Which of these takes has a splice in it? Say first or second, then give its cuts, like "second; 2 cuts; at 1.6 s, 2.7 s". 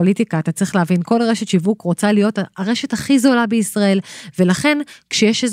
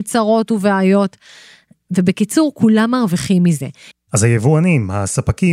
second; 1 cut; at 3.9 s